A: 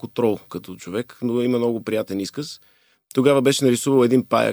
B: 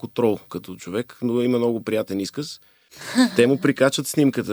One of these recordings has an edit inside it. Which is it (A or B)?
B